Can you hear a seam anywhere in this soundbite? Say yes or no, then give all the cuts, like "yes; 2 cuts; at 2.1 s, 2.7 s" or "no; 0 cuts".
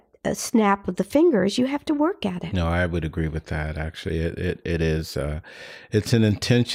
no; 0 cuts